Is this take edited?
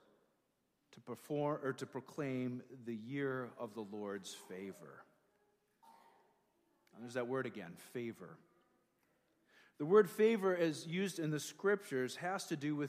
no; 0 cuts

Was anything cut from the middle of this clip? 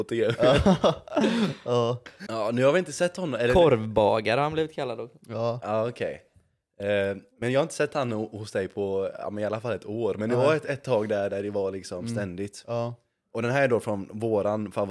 yes; 1 cut; at 2.3 s

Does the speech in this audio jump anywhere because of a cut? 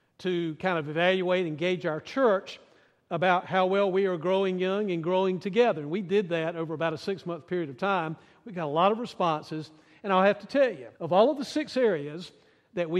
yes; 1 cut; at 10.9 s

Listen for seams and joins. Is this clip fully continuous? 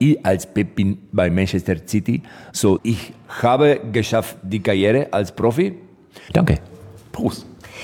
no; 2 cuts; at 2.8 s, 6.3 s

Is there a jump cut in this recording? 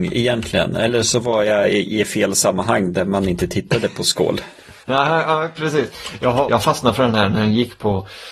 yes; 1 cut; at 6.5 s

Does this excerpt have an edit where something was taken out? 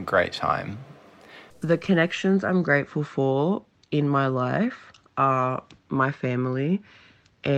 yes; 1 cut; at 1.5 s

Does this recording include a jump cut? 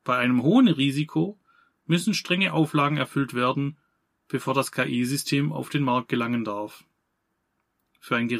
no; 0 cuts

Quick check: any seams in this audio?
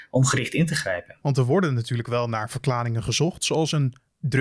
no; 0 cuts

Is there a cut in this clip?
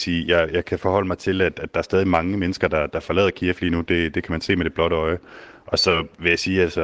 no; 0 cuts

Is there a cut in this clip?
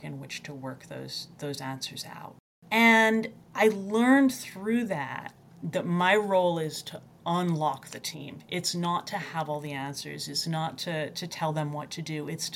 yes; 1 cut; at 3.4 s

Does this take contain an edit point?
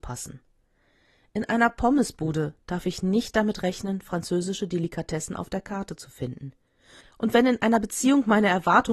no; 0 cuts

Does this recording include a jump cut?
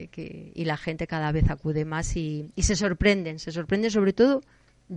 no; 0 cuts

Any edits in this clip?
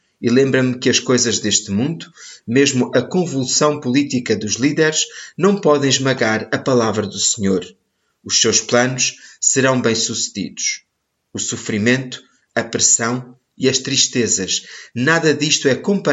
no; 0 cuts

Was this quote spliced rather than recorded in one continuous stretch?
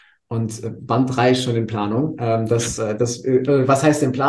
no; 0 cuts

